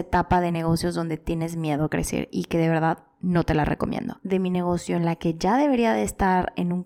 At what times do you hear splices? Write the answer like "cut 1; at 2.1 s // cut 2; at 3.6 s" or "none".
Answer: cut 1; at 4.2 s